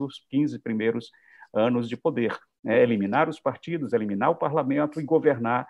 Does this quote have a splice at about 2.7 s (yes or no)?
no